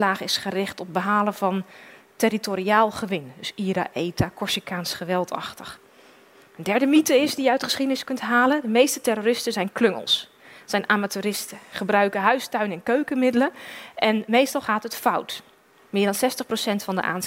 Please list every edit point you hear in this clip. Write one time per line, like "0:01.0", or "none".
0:15.8